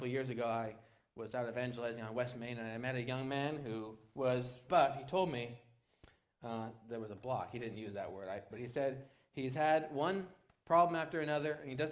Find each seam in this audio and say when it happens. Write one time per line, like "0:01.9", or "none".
0:04.7
0:08.5